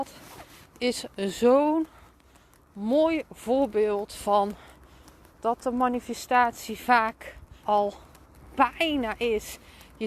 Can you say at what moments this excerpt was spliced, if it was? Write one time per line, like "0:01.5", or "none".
0:07.6